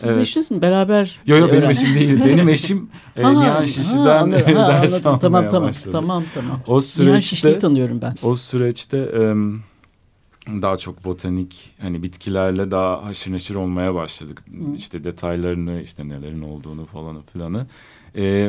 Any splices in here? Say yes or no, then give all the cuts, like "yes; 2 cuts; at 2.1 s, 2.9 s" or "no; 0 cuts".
yes; 1 cut; at 8.2 s